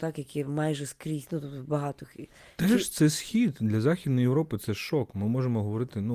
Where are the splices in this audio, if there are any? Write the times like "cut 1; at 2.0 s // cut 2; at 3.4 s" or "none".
none